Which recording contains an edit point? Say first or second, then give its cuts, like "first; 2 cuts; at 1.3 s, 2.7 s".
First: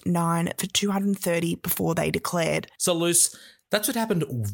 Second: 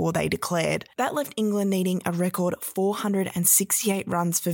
first; 1 cut; at 2.8 s